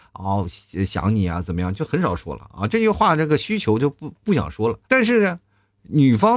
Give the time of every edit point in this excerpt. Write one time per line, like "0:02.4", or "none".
0:04.8